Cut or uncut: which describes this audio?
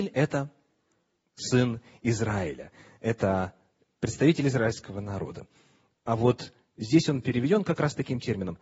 uncut